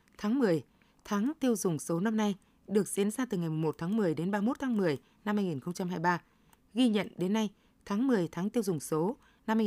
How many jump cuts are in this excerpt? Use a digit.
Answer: 1